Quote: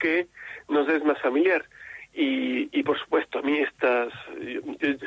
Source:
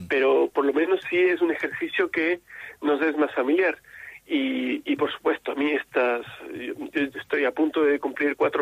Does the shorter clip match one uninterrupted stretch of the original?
yes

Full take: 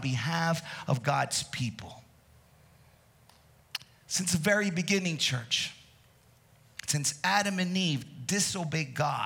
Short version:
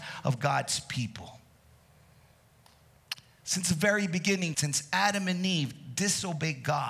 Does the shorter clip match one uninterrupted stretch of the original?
no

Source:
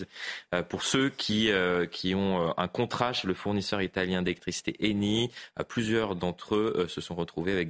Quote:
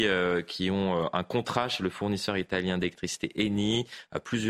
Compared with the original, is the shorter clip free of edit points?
yes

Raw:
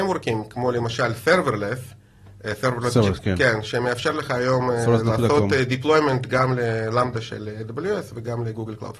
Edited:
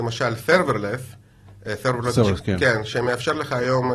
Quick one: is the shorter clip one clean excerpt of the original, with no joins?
yes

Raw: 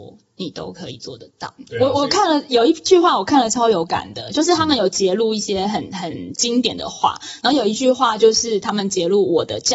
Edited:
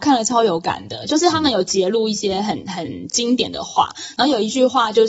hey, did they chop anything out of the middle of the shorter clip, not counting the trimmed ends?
no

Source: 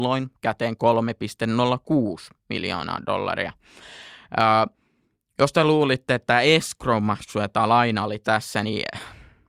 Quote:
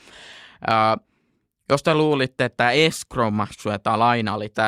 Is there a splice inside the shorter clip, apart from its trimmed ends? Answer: no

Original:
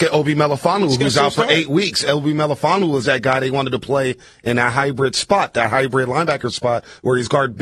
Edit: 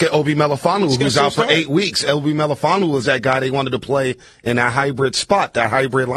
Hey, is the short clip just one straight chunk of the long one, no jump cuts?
yes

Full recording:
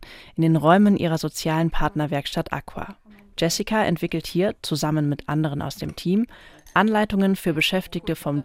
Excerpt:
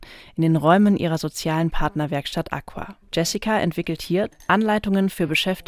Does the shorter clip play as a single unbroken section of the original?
no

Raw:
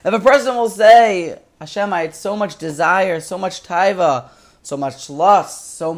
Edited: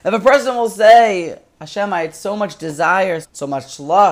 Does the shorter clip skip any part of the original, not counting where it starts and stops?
yes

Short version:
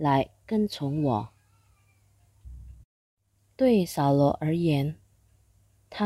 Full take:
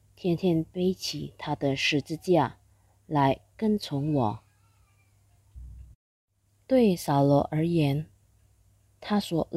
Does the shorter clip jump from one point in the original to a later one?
no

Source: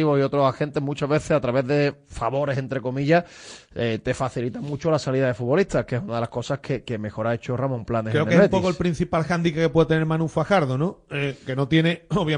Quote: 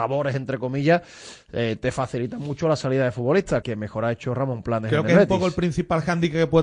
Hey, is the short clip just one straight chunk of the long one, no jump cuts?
no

